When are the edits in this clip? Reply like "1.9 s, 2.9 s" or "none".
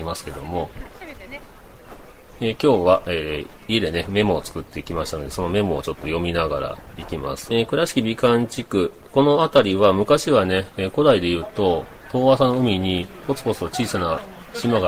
7.5 s